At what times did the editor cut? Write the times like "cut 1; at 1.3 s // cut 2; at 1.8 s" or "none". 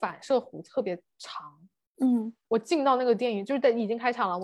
cut 1; at 2.4 s